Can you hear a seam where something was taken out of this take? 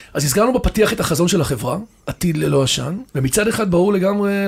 yes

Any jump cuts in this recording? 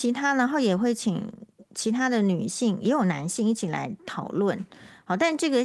no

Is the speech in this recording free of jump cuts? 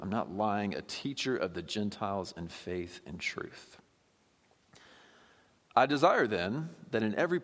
yes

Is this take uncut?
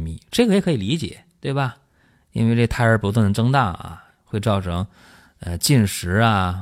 yes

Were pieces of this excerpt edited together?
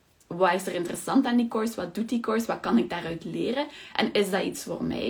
no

